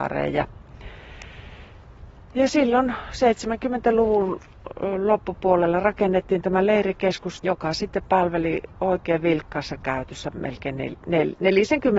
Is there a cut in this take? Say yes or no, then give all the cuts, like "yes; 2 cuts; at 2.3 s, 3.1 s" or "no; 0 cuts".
yes; 1 cut; at 7.4 s